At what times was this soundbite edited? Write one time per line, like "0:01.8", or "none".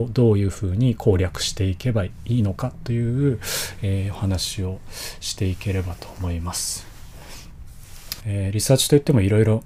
0:08.2